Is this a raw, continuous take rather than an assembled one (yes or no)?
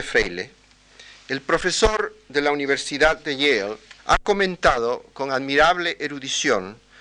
no